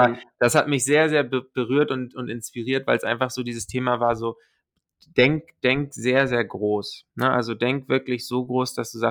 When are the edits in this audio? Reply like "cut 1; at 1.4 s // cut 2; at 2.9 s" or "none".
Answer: none